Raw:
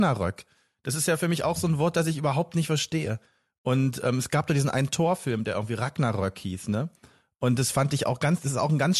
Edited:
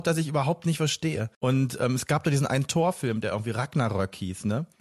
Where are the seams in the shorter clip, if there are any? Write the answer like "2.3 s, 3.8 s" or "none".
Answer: 1.3 s